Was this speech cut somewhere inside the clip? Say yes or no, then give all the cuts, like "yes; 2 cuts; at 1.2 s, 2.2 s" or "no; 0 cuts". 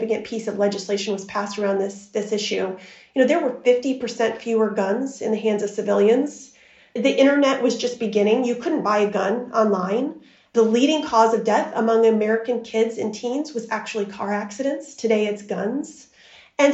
no; 0 cuts